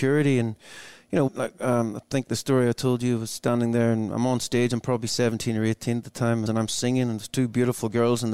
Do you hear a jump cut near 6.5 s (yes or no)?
yes